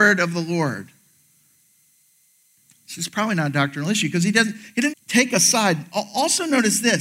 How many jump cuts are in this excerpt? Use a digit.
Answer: 1